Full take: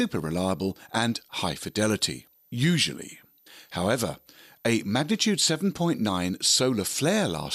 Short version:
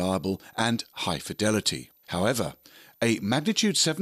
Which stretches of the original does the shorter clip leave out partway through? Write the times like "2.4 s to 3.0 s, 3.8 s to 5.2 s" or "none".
2.4 s to 3.7 s